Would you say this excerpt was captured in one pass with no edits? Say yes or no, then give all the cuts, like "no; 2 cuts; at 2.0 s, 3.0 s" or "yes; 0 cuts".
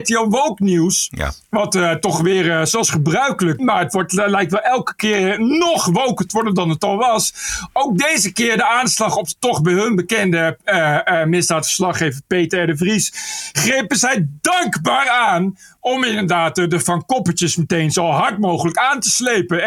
no; 1 cut; at 3.6 s